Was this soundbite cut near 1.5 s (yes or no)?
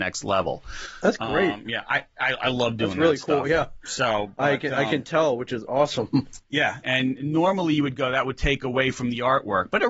no